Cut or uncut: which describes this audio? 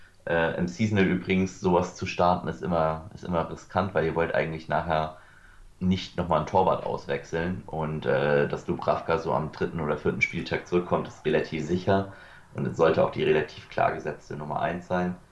cut